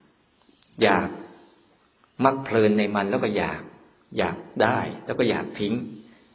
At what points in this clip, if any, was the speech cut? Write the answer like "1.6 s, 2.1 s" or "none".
none